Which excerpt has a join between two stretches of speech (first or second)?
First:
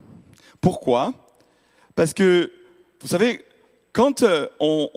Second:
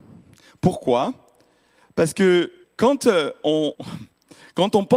second